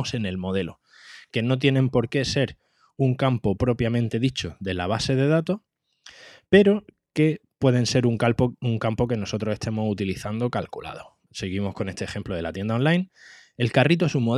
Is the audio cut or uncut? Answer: cut